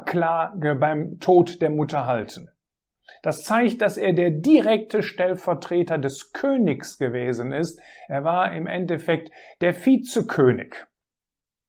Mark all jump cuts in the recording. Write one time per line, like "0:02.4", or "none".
none